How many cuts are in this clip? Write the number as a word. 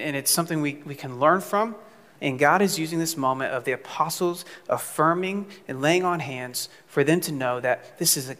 one